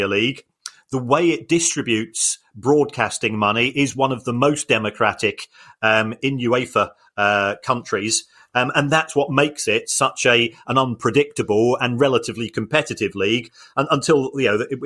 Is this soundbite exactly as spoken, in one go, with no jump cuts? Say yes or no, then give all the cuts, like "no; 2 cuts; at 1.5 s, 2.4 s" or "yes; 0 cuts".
no; 1 cut; at 6.2 s